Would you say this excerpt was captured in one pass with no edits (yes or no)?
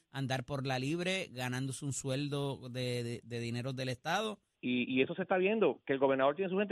no